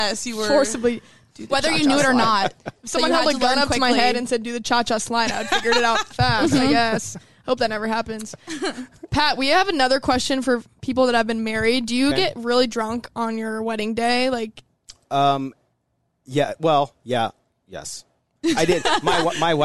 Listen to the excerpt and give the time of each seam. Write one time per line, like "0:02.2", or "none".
0:06.1